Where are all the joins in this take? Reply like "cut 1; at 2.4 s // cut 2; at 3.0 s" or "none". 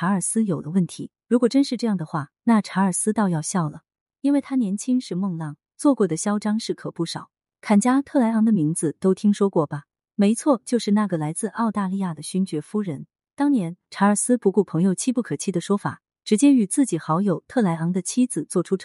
cut 1; at 1.2 s